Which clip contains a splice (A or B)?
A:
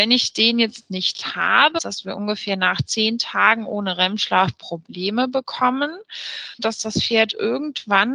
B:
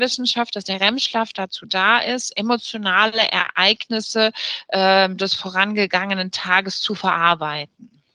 A